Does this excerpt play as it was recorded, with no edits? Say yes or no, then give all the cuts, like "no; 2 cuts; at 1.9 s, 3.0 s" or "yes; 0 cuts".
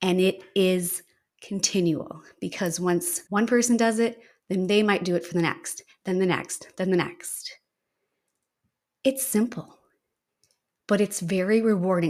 no; 1 cut; at 3.3 s